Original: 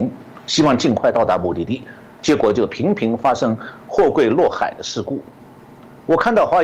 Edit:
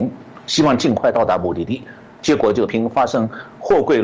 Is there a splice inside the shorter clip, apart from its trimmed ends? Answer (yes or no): yes